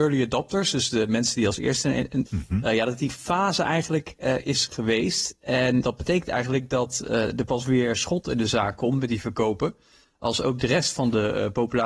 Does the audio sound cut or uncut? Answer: cut